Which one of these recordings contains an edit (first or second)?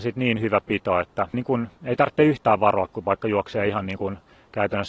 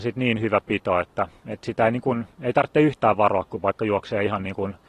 first